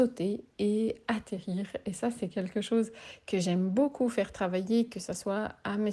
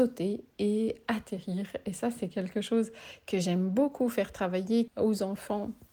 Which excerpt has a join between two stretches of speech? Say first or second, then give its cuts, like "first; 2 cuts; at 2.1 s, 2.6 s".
second; 1 cut; at 4.9 s